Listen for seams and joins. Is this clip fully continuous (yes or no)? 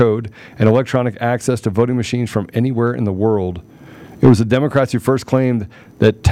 yes